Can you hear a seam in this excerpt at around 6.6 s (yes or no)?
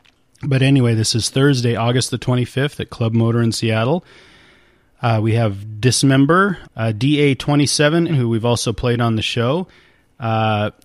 yes